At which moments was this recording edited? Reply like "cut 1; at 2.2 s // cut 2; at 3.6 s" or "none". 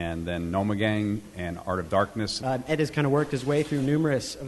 cut 1; at 2.4 s